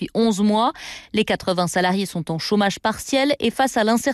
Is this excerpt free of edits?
yes; 0 cuts

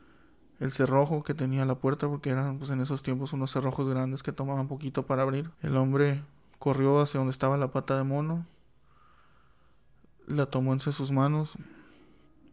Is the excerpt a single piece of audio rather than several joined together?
no; 1 cut; at 5.5 s

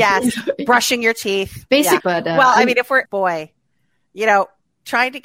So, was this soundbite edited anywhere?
yes; 2 cuts; at 2.0 s, 3.0 s

